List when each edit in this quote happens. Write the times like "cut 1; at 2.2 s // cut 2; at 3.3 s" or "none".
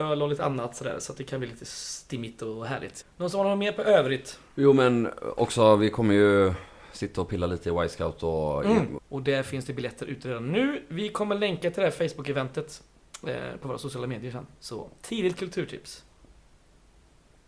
cut 1; at 3.0 s // cut 2; at 9.0 s // cut 3; at 14.5 s

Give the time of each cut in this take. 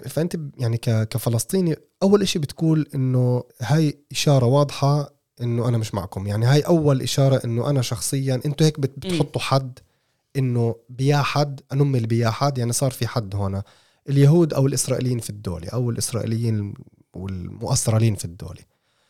cut 1; at 3.5 s

